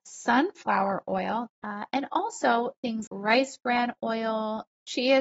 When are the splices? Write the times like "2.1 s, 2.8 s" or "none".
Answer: 1.5 s, 3.1 s